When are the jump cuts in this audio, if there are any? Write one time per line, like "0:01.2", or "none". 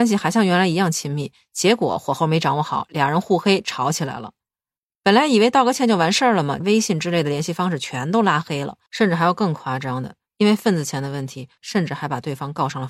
0:06.6
0:08.9
0:11.6